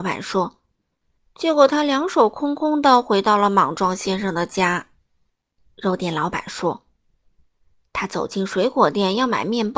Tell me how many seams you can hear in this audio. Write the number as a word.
one